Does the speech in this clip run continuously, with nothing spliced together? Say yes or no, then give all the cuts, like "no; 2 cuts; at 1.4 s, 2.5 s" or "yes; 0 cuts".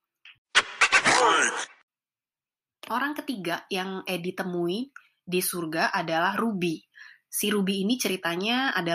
yes; 0 cuts